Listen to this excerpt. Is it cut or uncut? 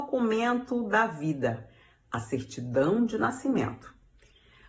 uncut